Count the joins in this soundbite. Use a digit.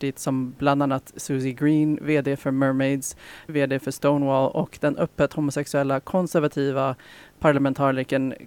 1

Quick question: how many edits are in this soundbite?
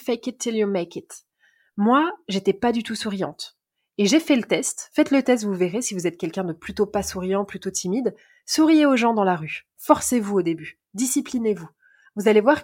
0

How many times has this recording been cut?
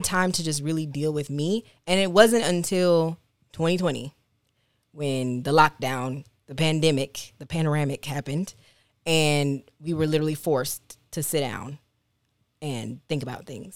0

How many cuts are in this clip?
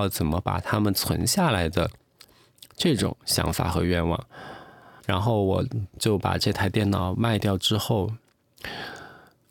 1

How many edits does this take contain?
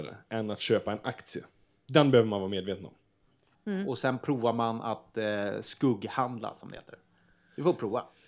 1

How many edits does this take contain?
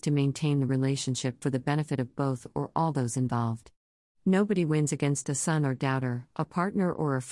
0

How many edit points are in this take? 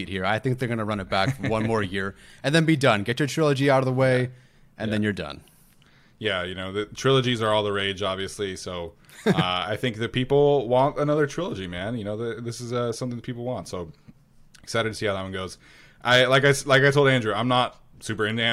0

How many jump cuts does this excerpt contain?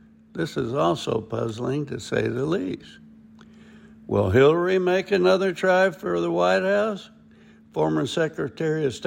0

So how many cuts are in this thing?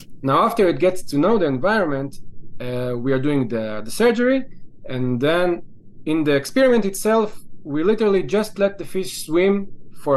0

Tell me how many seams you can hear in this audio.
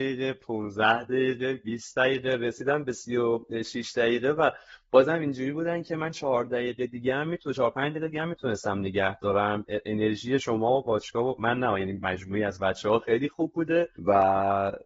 1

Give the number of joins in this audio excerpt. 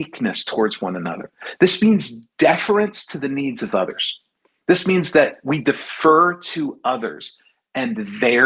0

